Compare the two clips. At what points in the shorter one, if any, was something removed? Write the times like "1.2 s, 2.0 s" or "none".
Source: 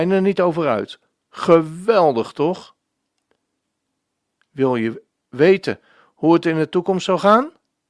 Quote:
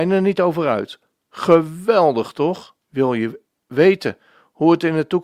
2.8 s